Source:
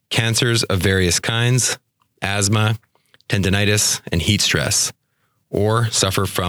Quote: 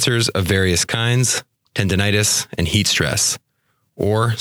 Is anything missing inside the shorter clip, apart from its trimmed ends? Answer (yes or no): yes